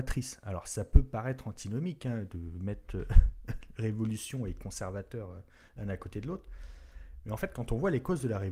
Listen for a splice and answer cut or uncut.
uncut